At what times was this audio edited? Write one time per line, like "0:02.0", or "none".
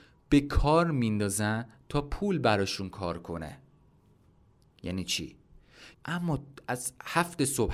0:05.9

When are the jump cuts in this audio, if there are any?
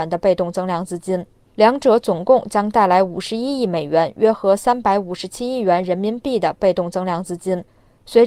none

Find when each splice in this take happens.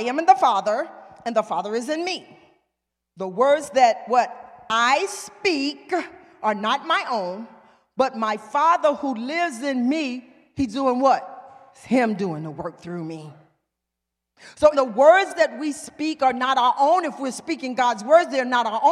0:14.7

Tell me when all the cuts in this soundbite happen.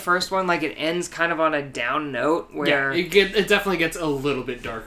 none

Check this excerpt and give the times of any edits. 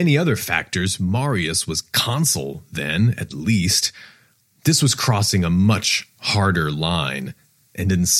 none

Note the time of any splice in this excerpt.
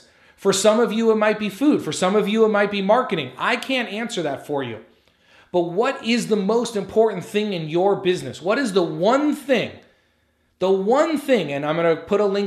none

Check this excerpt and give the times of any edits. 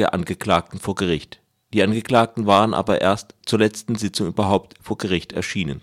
none

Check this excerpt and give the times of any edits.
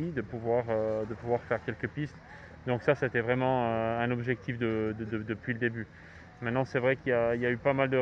none

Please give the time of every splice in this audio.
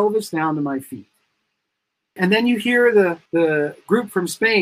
0:02.2
0:03.3

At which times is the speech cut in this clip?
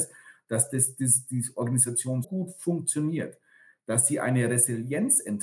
0:02.2

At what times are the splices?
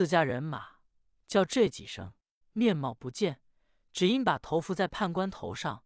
0:02.4

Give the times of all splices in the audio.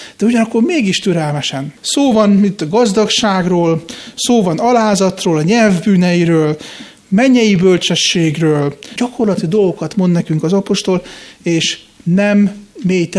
0:01.8
0:09.0

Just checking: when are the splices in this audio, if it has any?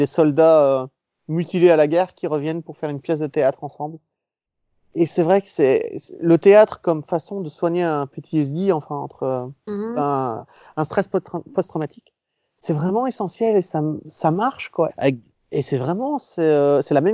0:09.7
0:14.9

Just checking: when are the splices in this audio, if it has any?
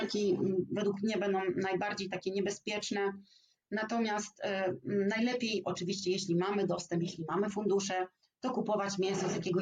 none

